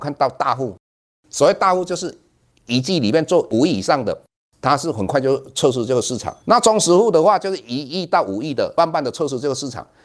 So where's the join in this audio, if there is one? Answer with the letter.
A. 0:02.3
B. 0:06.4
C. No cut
B